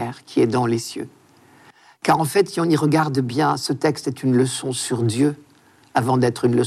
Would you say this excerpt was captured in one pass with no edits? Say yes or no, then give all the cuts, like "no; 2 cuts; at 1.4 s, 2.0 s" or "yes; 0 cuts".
yes; 0 cuts